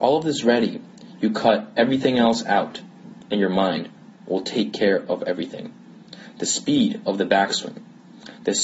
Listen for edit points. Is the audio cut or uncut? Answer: uncut